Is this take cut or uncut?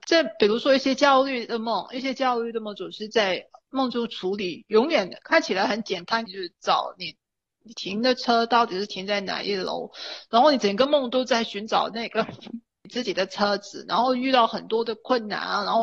cut